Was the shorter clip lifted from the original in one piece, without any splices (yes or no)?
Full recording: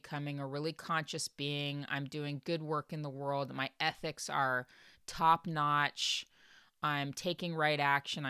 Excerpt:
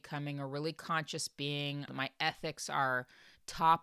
no